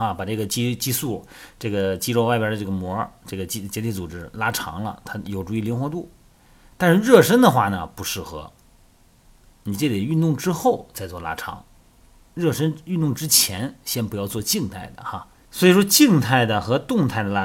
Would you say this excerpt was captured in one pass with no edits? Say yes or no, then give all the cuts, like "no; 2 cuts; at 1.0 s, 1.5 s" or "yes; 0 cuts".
no; 1 cut; at 15.5 s